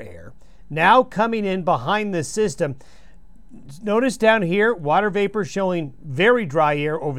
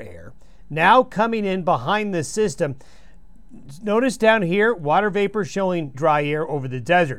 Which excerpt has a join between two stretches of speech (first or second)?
second